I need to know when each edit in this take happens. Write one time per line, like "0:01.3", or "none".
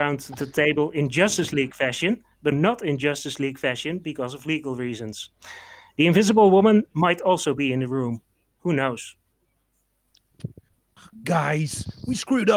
0:02.5